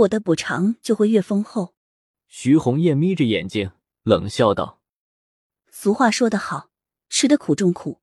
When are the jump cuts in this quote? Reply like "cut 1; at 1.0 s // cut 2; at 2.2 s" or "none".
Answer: cut 1; at 1.8 s